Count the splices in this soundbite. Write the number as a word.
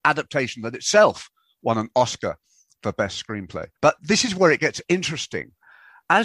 one